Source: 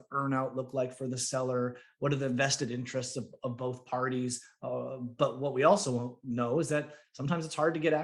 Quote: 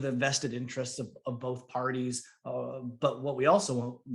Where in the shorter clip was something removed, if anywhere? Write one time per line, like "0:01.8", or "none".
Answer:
none